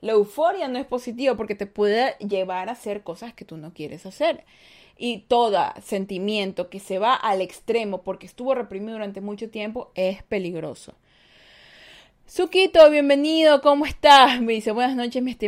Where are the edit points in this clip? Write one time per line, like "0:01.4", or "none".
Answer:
none